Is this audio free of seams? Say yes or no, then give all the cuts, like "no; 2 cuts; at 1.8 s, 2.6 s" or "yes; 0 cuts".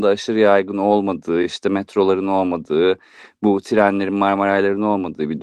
yes; 0 cuts